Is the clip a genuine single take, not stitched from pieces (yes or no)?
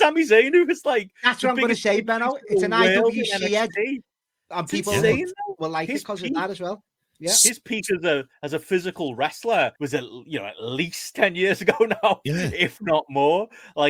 no